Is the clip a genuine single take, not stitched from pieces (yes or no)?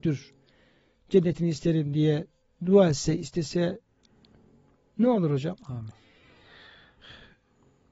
no